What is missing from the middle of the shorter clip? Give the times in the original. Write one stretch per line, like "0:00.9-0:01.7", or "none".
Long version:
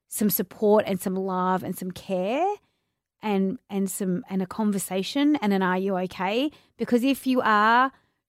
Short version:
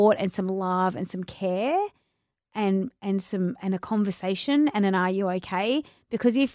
none